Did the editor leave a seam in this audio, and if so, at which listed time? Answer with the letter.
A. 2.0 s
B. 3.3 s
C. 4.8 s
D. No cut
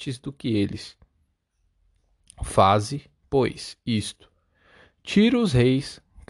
D